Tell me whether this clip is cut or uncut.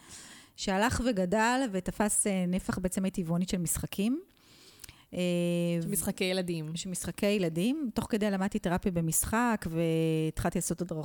uncut